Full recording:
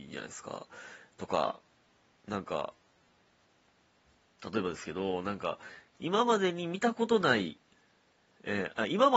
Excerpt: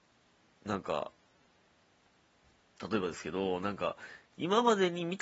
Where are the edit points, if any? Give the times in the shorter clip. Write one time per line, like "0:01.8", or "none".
none